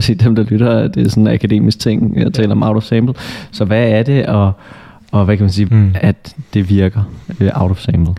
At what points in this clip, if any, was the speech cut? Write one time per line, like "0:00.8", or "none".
0:05.7